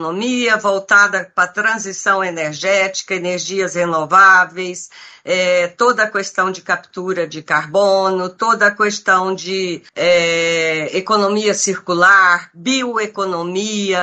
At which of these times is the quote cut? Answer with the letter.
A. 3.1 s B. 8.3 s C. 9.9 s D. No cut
C